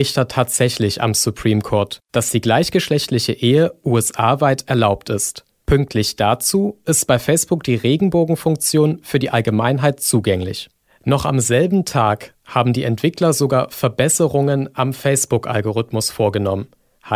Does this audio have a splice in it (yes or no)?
no